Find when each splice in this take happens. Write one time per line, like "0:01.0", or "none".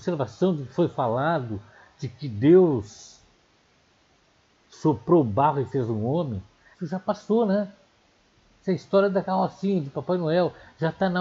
0:06.7

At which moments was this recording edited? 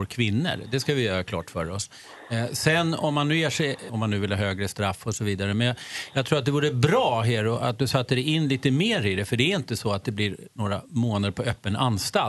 0:03.9

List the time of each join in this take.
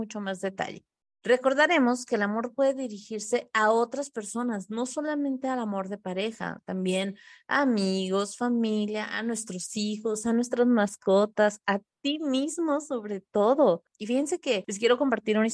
0:01.2
0:13.9

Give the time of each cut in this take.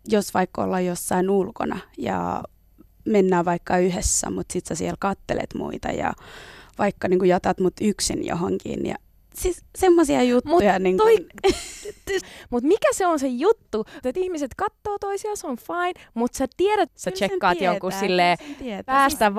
0:12.2
0:14.0
0:16.9

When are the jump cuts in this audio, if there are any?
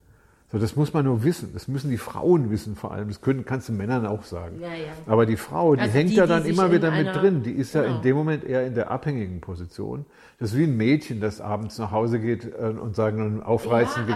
none

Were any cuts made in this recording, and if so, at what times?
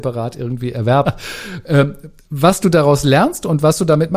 0:01.0

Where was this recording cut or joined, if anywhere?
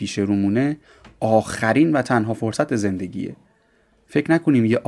none

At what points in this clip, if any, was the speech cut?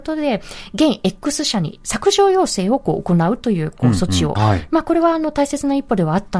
0:04.4

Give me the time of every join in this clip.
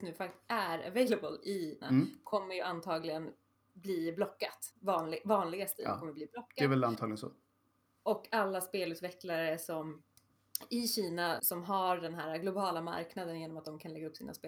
0:01.8
0:11.4

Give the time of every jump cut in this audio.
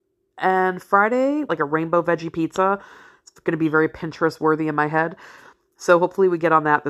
0:01.5

